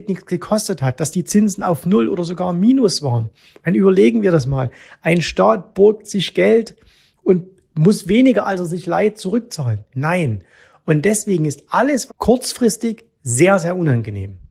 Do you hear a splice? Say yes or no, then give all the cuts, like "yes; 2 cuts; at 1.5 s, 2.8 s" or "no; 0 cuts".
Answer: yes; 2 cuts; at 9.9 s, 12.1 s